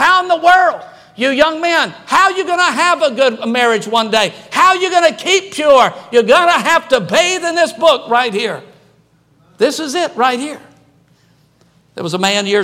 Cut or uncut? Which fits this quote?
uncut